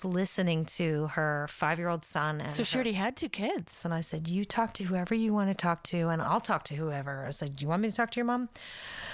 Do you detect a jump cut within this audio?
yes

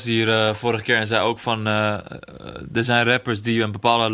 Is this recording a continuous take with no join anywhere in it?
yes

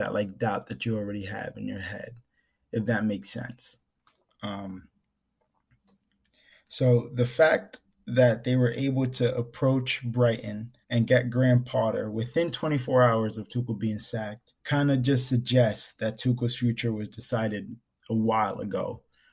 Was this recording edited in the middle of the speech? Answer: yes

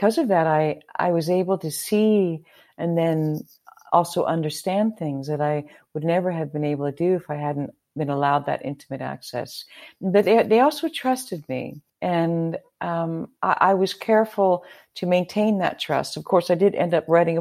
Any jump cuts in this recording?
yes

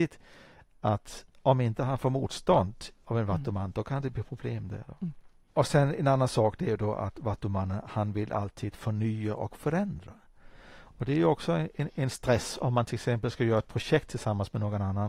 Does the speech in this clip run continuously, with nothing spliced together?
no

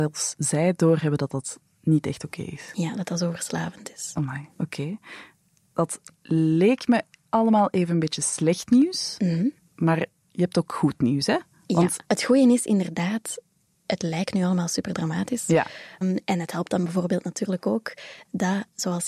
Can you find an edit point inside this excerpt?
yes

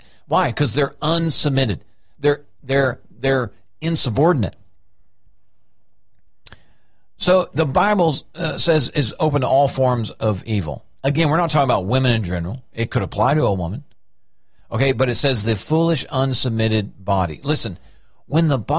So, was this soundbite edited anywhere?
no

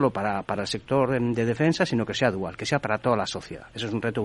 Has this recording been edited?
no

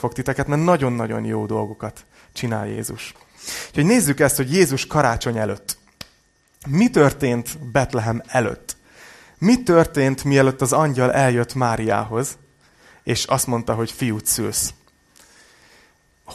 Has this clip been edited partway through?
no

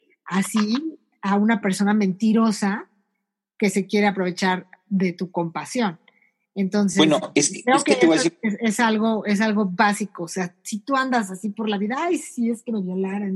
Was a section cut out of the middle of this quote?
no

